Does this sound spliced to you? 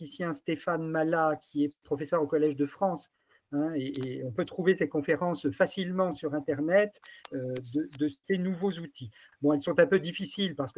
yes; 2 cuts; at 7.2 s, 9.3 s

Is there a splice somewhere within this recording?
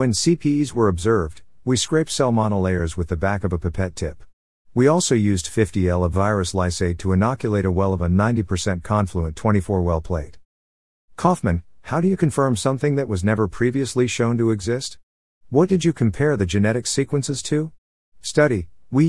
yes; 2 cuts; at 4.6 s, 18.1 s

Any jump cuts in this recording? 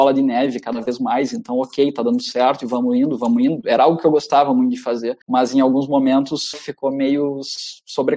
yes; 2 cuts; at 5.2 s, 6.5 s

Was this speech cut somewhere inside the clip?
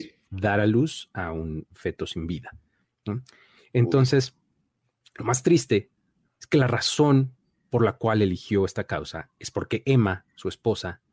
no; 0 cuts

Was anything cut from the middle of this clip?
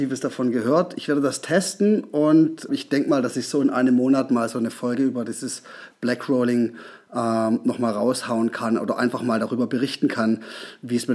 yes; 1 cut; at 2.7 s

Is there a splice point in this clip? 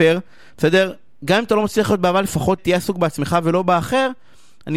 yes; 1 cut; at 2.6 s

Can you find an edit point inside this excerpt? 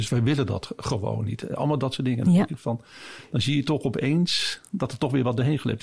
no; 0 cuts

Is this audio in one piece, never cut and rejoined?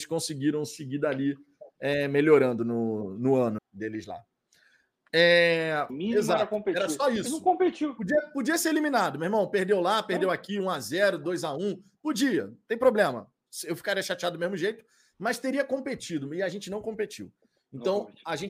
no; 2 cuts; at 3.6 s, 5.9 s

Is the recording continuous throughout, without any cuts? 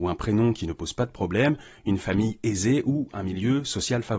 yes; 0 cuts

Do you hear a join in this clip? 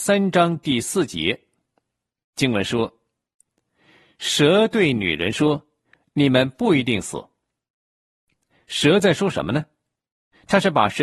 no; 0 cuts

